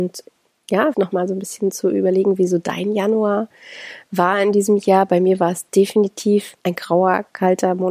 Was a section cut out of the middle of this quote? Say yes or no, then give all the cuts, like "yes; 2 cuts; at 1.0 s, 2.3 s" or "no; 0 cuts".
yes; 2 cuts; at 0.9 s, 6.6 s